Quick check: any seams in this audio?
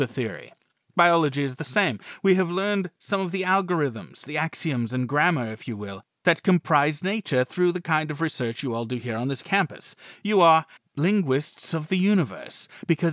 yes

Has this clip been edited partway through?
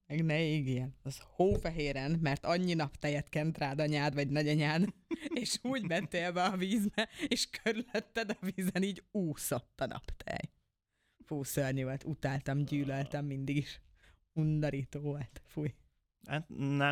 no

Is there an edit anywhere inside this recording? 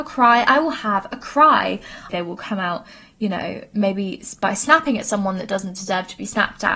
yes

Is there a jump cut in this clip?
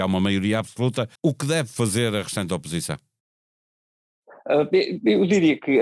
yes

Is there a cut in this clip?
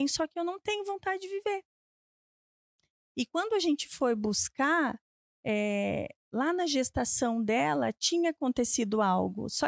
no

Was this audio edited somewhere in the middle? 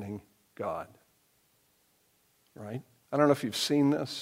yes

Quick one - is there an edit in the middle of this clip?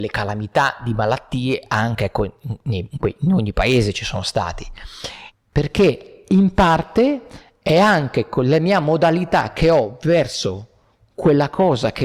yes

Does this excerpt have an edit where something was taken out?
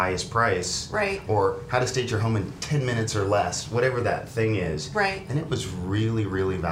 no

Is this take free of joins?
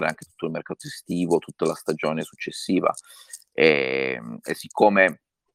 yes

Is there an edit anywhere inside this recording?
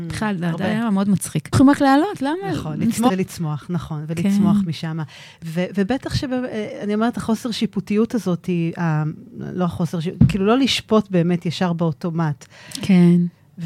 yes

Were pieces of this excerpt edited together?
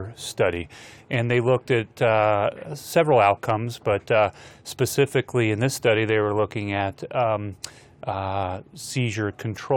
no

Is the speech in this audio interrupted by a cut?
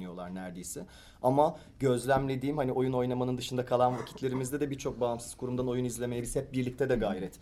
no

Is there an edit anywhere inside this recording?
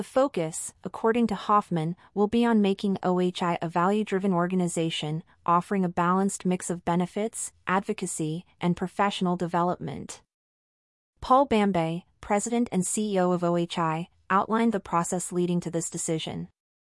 no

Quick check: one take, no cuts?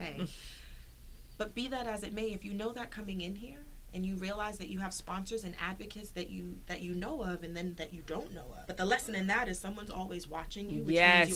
no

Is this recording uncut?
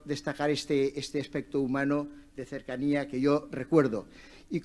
yes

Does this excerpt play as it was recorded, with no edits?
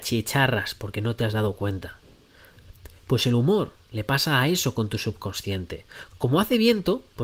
no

